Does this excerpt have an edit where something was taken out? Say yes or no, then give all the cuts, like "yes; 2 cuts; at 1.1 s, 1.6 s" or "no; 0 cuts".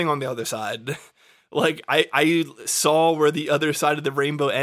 no; 0 cuts